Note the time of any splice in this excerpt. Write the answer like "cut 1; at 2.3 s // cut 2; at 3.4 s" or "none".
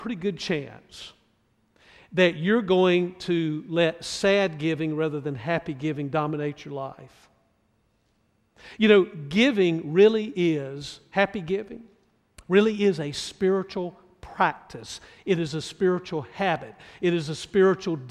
none